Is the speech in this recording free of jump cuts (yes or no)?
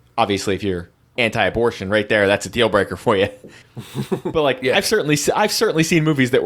yes